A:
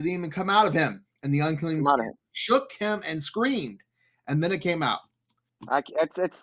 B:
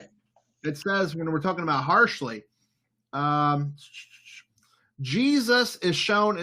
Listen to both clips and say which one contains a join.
A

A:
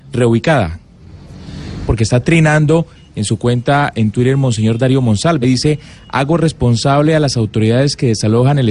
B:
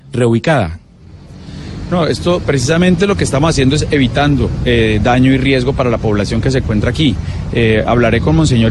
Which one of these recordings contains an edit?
A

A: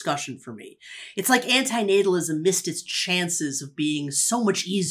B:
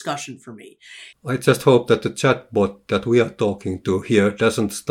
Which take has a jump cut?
B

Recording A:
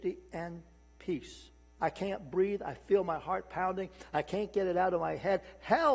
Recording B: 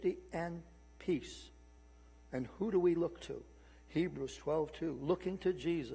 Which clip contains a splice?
A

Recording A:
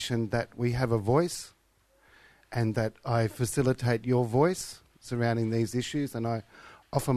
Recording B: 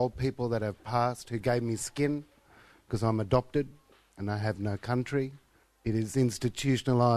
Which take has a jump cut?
B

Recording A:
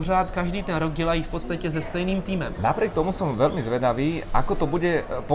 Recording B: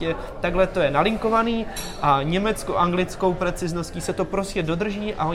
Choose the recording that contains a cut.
A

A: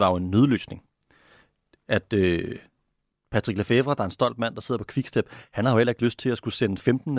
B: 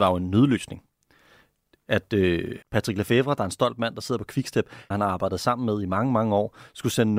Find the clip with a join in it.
B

